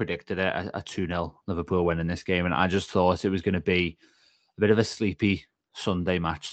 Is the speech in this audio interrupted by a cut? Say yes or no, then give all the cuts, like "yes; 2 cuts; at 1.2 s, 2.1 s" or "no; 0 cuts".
no; 0 cuts